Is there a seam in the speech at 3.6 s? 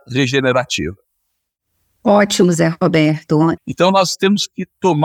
yes; 1 cut; at 3.6 s

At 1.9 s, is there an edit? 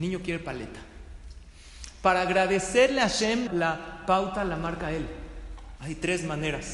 no; 2 cuts; at 3.5 s, 5.8 s

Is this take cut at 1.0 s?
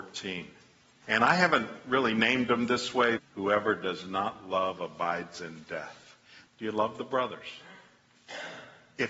yes; 3 cuts; at 1.0 s, 3.2 s, 6.5 s

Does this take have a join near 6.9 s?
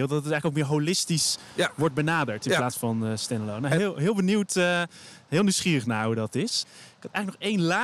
no; 0 cuts

